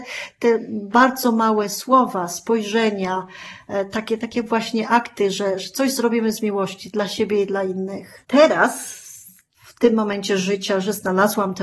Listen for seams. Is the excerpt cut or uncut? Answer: cut